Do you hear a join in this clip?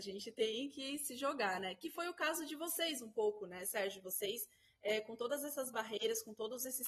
no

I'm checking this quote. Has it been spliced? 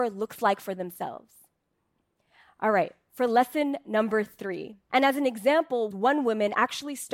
yes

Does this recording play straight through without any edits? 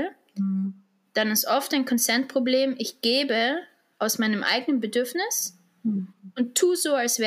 yes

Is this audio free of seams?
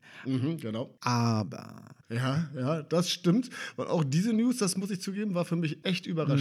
no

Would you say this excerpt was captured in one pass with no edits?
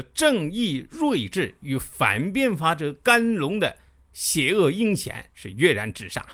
yes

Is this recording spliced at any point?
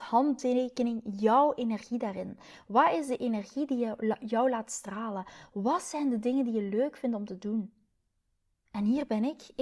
yes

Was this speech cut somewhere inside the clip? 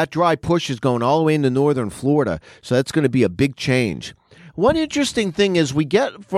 no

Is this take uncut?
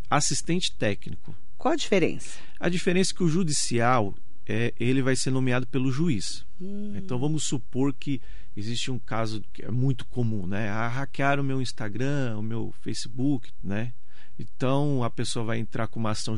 no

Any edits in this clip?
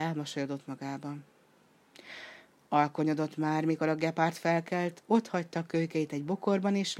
no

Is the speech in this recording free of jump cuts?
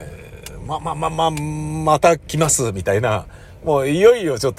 yes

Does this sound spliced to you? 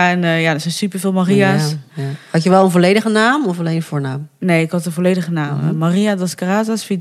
no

